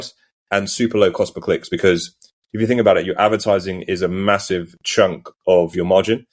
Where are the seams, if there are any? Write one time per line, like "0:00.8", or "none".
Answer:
none